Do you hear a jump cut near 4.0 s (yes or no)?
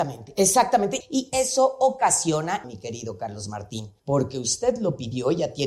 yes